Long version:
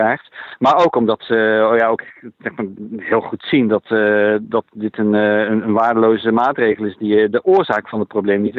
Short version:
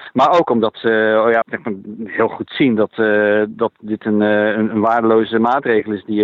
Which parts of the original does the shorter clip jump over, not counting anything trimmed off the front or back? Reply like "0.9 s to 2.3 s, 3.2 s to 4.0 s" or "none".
1.9 s to 2.3 s

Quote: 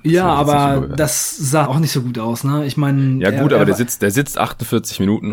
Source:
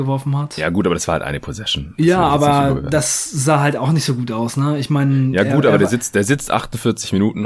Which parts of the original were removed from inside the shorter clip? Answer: 3.6 s to 3.8 s

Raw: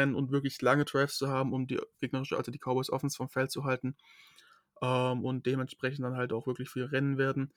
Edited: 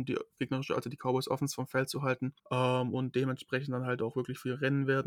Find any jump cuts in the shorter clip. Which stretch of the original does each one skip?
4.0 s to 4.7 s

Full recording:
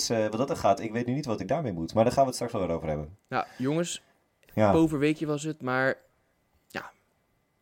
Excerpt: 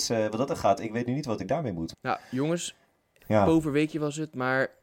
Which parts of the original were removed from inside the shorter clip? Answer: 1.9 s to 3.2 s

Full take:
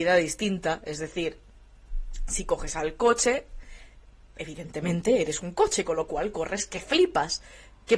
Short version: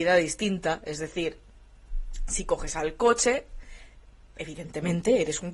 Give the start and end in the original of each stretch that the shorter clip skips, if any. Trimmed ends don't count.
none

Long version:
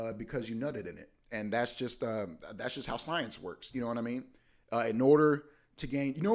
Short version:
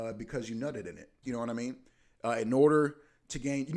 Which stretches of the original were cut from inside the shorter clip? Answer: 1.2 s to 3.7 s

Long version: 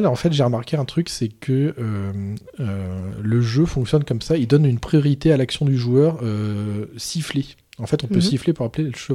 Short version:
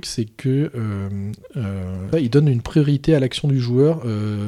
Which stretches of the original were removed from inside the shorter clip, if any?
3.2 s to 4.3 s

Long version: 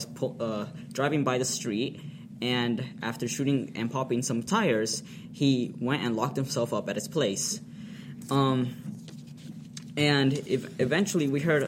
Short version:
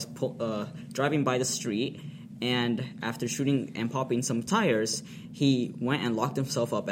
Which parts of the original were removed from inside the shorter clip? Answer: none

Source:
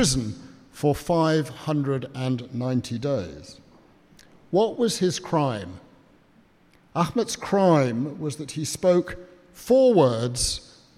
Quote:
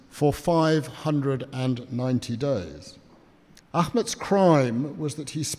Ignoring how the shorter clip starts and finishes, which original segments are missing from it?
4.2 s to 6.8 s

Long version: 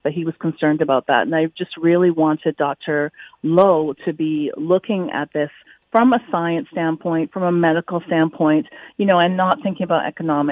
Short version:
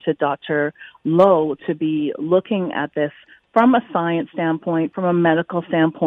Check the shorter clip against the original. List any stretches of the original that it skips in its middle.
none

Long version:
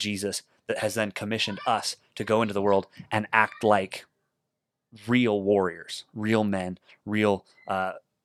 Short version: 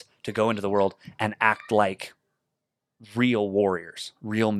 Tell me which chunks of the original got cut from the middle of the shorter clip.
none

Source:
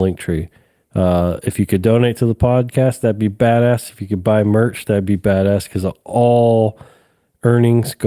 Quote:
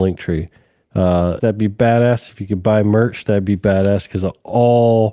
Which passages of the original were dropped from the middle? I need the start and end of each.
1.4 s to 3.0 s

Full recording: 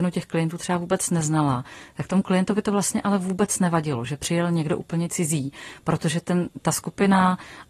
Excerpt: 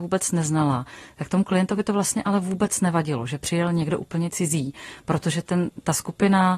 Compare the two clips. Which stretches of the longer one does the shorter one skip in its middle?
none

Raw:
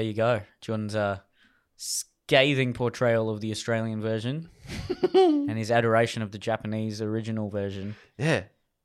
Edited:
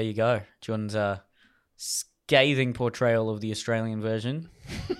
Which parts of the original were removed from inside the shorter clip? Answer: none

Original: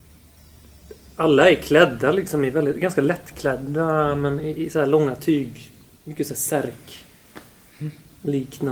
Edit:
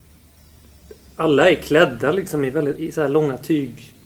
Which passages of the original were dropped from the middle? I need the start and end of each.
2.7 s to 4.5 s

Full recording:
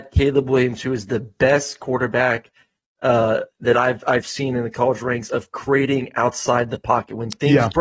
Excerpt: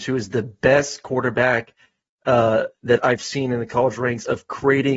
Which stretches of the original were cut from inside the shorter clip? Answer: 3.7 s to 4.0 s

